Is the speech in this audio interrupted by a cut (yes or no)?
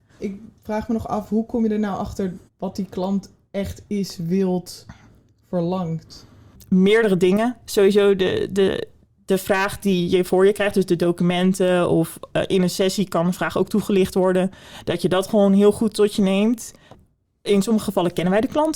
yes